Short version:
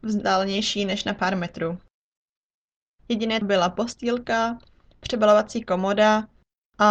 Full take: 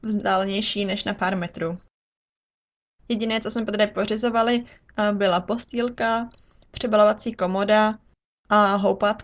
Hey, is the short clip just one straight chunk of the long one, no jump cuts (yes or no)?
no